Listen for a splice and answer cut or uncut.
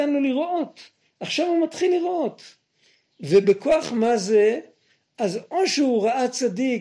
uncut